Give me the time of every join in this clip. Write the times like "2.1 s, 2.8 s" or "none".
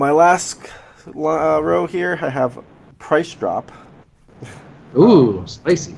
none